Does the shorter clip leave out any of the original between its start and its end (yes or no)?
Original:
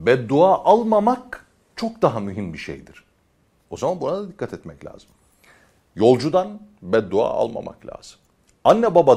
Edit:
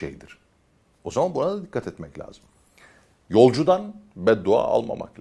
no